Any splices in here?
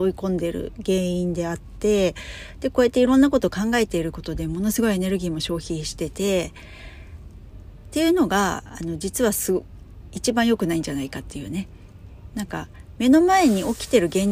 no; 0 cuts

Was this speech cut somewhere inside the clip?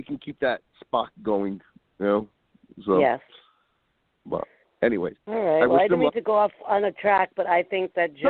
no; 0 cuts

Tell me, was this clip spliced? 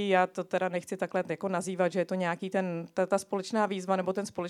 no; 0 cuts

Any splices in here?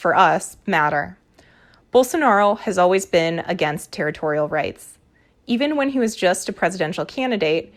no; 0 cuts

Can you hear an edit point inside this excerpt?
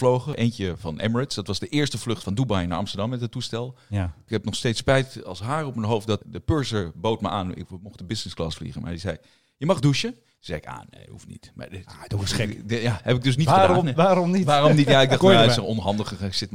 no; 0 cuts

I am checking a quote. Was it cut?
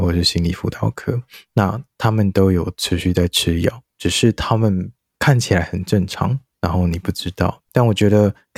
no; 0 cuts

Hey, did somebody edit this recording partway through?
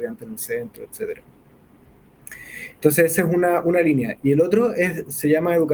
no; 0 cuts

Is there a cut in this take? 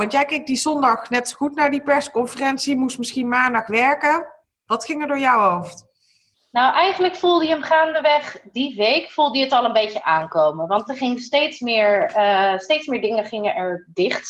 no; 0 cuts

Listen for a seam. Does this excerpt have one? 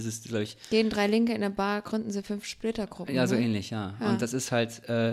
no; 0 cuts

